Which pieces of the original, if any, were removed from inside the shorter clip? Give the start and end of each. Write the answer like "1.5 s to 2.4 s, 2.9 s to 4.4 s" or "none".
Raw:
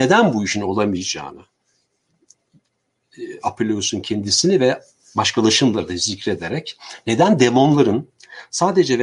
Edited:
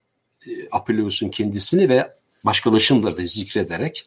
none